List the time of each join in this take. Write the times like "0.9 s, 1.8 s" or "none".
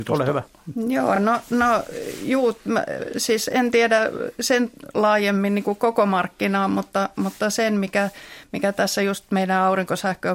none